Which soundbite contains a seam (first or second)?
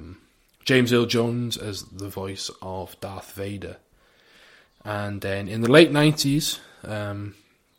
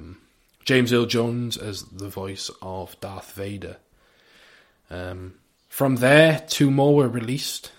first